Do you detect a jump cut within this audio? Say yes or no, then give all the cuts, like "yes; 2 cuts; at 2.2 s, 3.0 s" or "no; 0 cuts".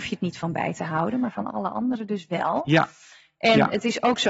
no; 0 cuts